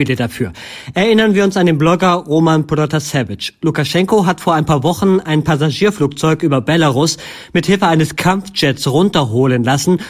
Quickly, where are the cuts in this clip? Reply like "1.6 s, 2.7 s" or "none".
none